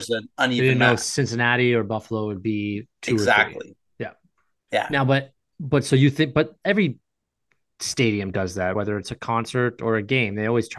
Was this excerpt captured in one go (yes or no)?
yes